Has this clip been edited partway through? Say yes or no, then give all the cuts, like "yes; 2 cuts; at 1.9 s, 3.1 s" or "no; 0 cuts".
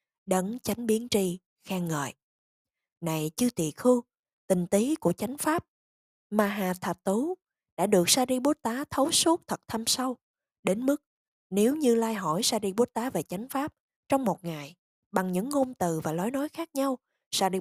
no; 0 cuts